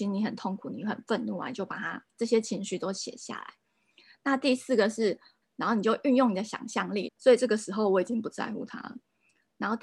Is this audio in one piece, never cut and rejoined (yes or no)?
no